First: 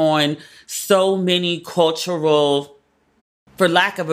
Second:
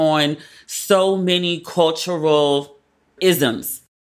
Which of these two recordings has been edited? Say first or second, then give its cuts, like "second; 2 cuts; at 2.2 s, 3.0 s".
second; 1 cut; at 3.2 s